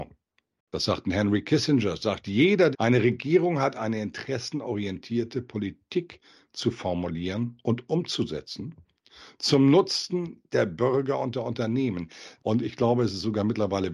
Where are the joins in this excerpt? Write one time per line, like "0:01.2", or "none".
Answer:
0:02.7
0:12.4